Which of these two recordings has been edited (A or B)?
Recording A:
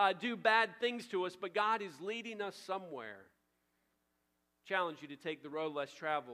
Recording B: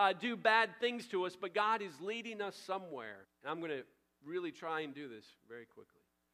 B